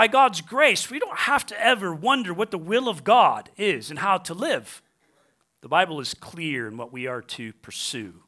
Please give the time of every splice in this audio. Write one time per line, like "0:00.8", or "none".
0:05.4